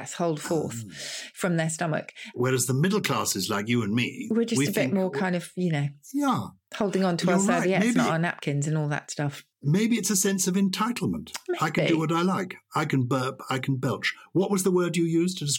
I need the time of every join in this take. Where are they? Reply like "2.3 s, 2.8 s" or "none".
9.5 s